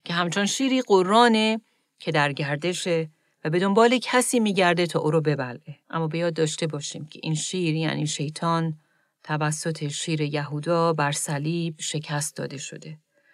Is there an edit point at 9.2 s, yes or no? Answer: no